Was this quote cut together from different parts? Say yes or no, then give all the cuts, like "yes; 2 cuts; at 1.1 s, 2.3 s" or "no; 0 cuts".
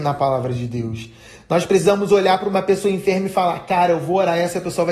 no; 0 cuts